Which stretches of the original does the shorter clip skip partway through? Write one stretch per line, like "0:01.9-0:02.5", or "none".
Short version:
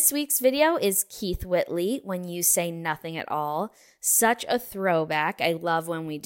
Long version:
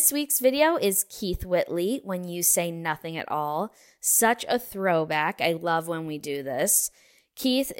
none